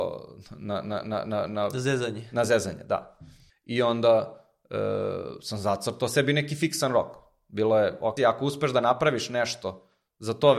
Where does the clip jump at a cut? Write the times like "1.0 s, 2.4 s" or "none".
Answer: 3.5 s, 8.2 s